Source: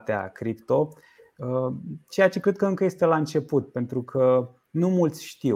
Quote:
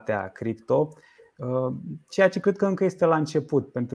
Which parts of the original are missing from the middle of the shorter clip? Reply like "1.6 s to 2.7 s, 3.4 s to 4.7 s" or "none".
none